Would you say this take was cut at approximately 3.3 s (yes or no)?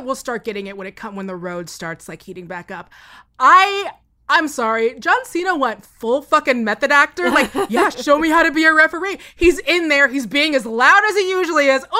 no